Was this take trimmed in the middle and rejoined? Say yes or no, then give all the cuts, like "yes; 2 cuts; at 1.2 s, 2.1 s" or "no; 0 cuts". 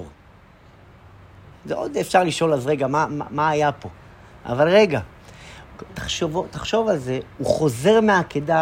yes; 1 cut; at 5.9 s